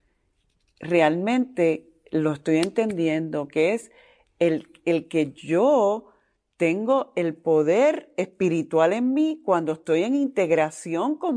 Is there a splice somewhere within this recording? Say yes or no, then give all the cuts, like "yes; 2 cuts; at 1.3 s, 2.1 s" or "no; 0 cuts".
no; 0 cuts